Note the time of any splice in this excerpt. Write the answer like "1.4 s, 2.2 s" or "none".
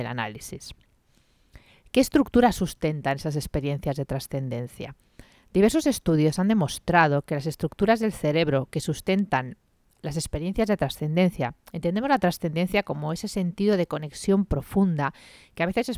none

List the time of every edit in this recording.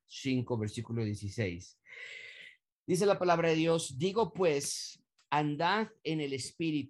none

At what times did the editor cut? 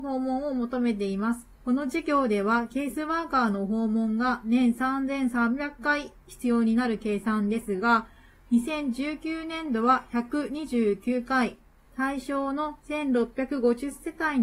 1.5 s, 11.8 s

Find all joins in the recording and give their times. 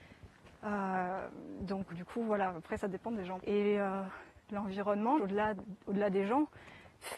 1.9 s, 3.4 s, 5.2 s

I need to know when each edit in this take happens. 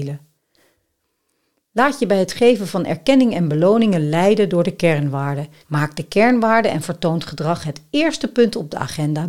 5.6 s

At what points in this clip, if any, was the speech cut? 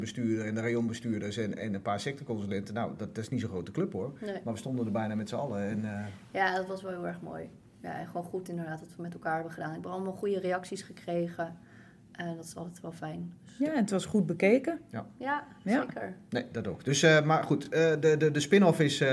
none

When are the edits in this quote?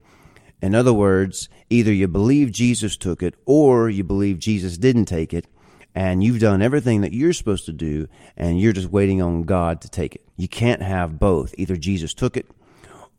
10.3 s

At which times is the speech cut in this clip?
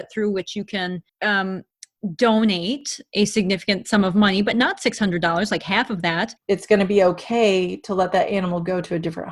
6.4 s

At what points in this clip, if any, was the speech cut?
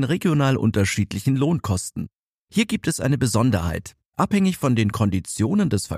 2.4 s

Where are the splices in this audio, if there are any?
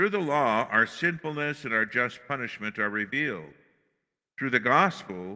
none

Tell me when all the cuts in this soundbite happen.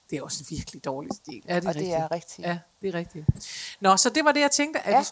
1.4 s

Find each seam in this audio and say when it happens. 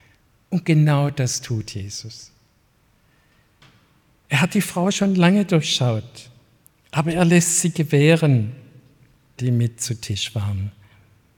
9.4 s

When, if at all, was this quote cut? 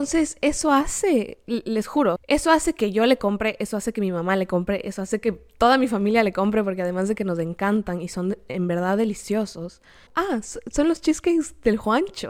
2.2 s, 10.1 s

